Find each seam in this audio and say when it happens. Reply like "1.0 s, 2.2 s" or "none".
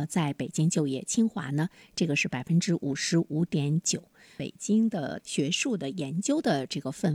none